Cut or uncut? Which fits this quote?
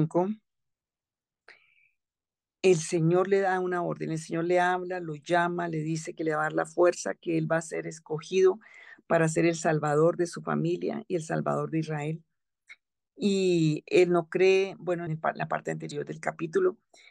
cut